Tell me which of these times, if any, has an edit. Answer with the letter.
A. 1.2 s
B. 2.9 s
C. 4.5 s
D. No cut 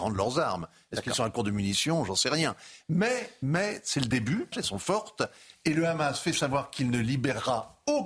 C